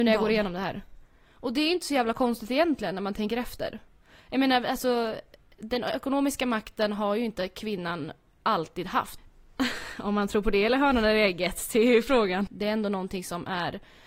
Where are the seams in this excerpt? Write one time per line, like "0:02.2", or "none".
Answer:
0:01.2
0:09.2
0:12.5